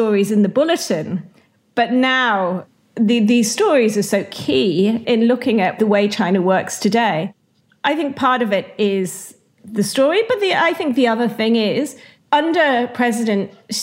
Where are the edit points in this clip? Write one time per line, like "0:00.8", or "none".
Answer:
0:05.0